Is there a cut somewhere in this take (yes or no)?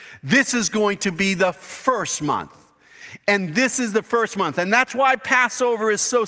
no